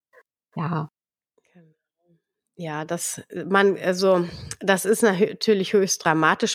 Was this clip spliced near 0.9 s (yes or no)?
no